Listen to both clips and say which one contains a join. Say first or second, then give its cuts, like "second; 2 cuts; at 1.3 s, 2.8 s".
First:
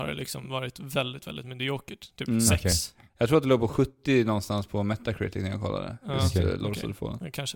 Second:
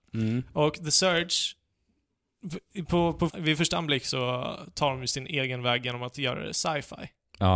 second; 1 cut; at 3.3 s